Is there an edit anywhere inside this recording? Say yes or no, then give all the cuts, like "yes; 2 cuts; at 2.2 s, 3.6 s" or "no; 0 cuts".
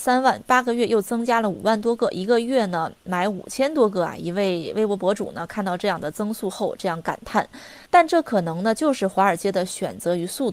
yes; 1 cut; at 7.9 s